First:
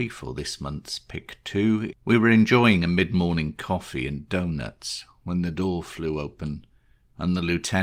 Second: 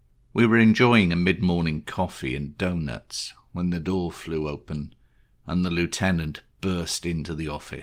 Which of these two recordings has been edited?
first; 1 cut; at 1.9 s

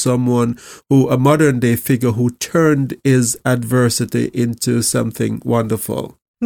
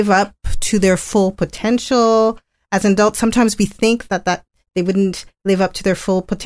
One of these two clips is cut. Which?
second; 1 cut; at 4.1 s

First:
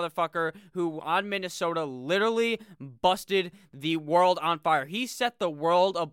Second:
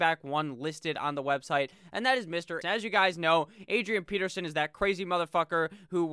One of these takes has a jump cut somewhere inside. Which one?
second; 1 cut; at 2.6 s

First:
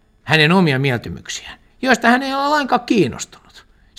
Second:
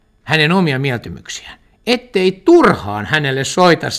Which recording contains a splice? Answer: first; 1 cut; at 1.7 s

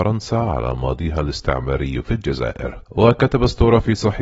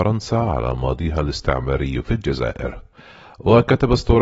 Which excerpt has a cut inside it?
first; 1 cut; at 2.9 s

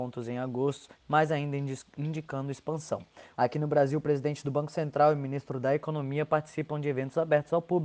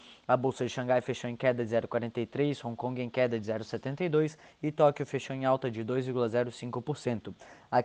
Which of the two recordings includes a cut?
first; 2 cuts; at 1.0 s, 3.3 s

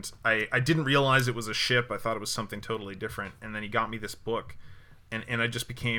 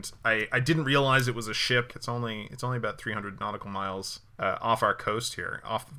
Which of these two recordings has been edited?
second; 2 cuts; at 1.9 s, 4.3 s

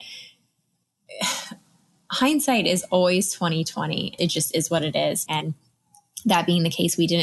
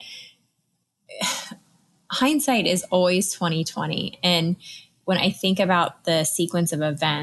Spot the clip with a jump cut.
first; 2 cuts; at 4.2 s, 5.3 s

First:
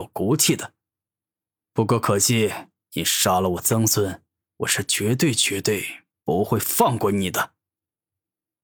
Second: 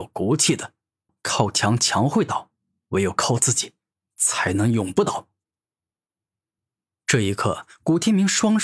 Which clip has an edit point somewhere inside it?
second; 1 cut; at 1.1 s

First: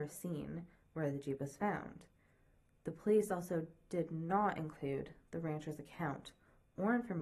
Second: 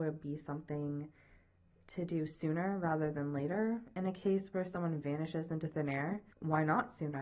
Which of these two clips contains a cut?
second; 1 cut; at 6.3 s

